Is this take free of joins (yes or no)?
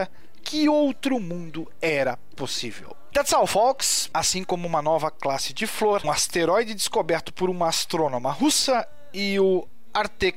no